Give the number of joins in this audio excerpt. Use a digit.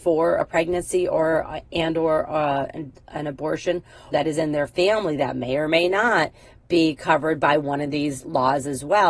1